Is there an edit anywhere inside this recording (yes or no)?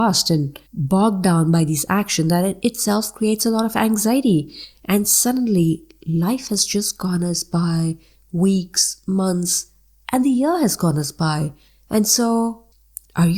no